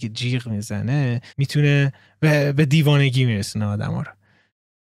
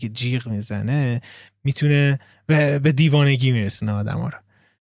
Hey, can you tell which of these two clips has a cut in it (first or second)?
first